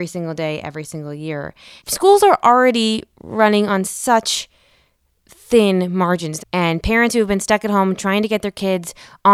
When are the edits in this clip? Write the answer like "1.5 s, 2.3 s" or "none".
1.8 s, 6.4 s